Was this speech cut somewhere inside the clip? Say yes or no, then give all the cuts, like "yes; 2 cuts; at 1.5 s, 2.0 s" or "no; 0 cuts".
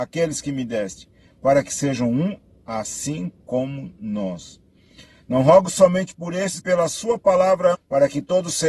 yes; 2 cuts; at 6.6 s, 7.7 s